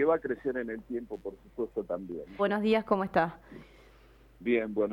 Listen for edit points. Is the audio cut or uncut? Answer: cut